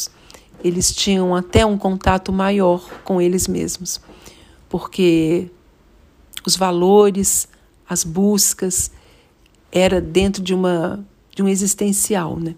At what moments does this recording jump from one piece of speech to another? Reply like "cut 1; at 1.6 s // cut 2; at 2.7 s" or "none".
none